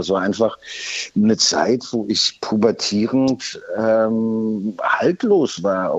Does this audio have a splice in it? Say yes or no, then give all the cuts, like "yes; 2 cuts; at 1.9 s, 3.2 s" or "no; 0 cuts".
no; 0 cuts